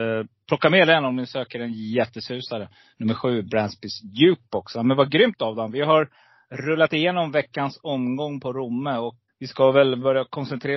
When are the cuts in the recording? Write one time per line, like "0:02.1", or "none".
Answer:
0:09.3